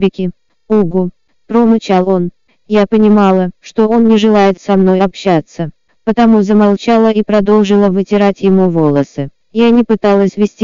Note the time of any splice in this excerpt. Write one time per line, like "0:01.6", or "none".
0:03.6
0:09.4